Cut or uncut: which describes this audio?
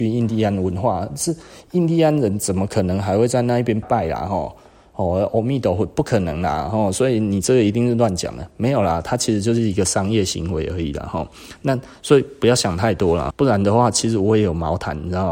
cut